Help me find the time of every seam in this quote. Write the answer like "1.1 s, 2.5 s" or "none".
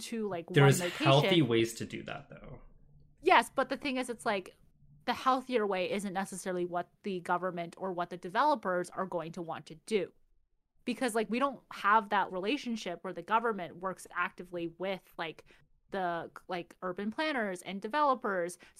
12.3 s